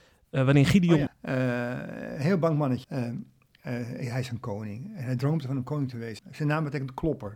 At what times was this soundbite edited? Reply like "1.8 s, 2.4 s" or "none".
1.1 s, 2.8 s, 6.2 s